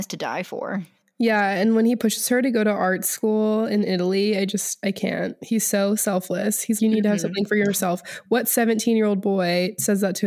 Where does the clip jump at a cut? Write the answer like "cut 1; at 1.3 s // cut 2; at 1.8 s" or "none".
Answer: cut 1; at 6.8 s